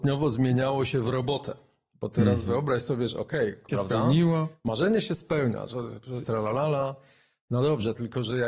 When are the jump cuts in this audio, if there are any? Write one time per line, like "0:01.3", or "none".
0:03.7
0:06.2